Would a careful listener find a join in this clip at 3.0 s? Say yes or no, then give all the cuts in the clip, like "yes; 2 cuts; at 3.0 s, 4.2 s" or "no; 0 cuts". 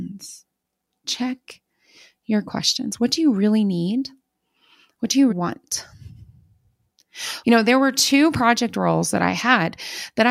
no; 2 cuts; at 5.3 s, 7.4 s